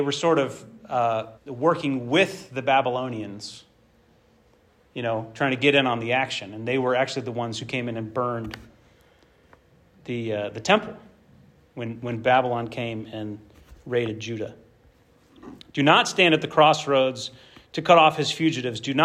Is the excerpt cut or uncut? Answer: cut